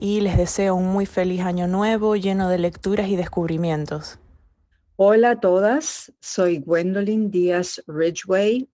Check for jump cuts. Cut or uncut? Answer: uncut